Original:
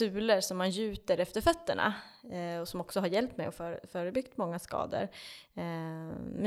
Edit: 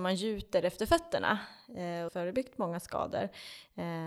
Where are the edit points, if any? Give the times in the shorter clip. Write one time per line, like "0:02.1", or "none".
0:02.1

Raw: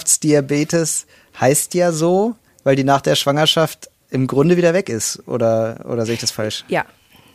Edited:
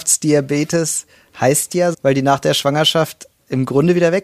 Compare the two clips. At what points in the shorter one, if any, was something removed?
0:01.9

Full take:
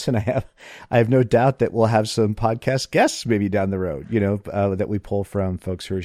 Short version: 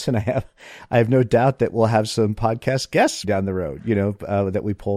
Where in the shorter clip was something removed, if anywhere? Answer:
0:03.2

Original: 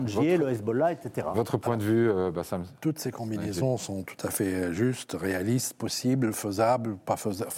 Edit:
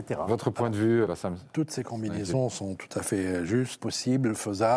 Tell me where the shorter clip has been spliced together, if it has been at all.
0:01.1
0:03.8

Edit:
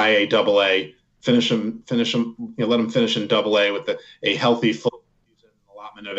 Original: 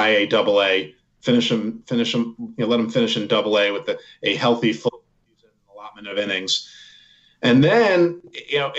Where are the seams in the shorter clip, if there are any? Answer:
none

